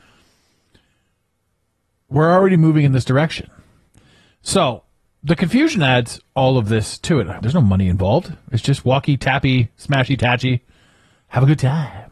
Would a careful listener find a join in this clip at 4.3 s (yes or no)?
no